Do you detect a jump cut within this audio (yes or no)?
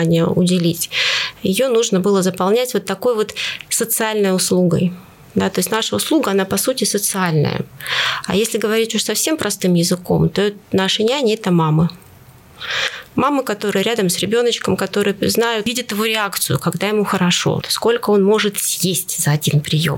yes